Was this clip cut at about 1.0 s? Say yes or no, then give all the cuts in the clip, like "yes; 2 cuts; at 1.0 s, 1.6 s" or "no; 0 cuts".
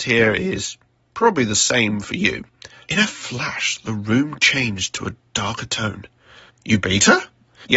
no; 2 cuts; at 2.8 s, 6.5 s